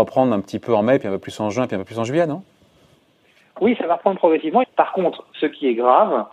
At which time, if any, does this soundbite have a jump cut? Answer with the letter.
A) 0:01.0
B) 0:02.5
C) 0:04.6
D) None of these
C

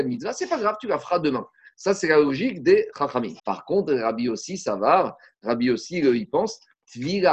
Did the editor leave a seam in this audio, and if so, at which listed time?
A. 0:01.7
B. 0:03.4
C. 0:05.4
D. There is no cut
B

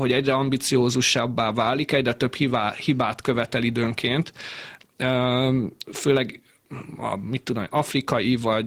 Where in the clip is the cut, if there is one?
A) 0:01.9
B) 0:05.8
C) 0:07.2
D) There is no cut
B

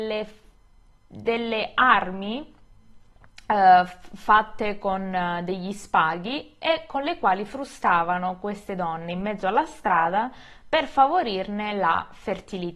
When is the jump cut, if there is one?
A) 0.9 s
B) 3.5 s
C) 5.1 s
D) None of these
D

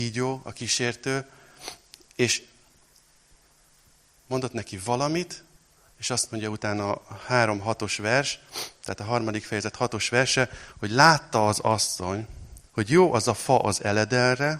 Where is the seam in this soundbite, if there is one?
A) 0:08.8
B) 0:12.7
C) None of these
B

